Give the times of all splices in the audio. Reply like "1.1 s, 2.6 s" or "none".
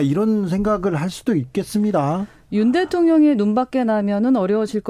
none